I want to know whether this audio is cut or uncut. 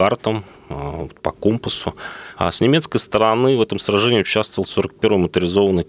cut